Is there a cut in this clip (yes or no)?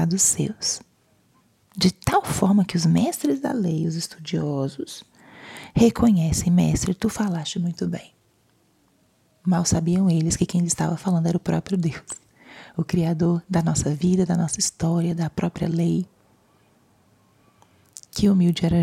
no